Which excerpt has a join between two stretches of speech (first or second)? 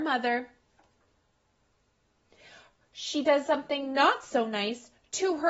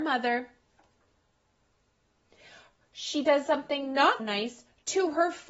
second